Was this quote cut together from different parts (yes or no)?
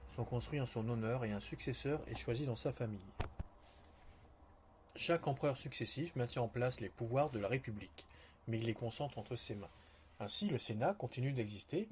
no